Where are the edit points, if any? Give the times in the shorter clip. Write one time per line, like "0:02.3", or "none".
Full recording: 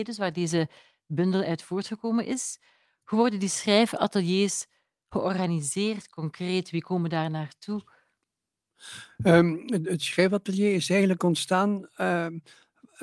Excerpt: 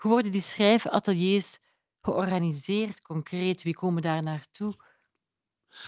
none